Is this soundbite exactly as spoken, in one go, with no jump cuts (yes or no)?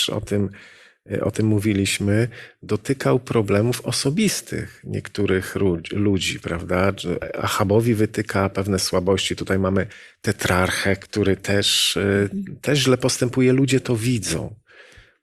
yes